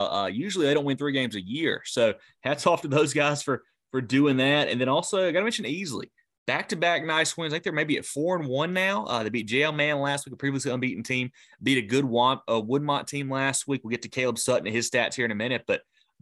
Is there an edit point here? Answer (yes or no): no